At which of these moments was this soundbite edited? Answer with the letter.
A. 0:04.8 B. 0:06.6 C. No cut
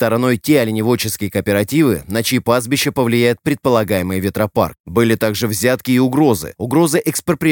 A